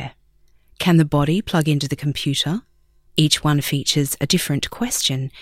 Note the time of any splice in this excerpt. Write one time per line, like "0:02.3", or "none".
0:03.1